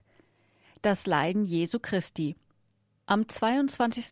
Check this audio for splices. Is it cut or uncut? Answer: cut